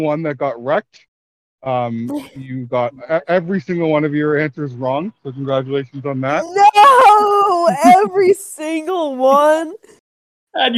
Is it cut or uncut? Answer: uncut